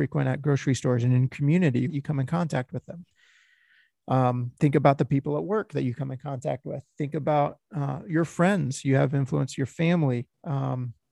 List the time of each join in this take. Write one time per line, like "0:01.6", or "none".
0:01.9